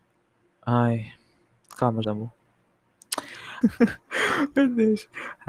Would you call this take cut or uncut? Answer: cut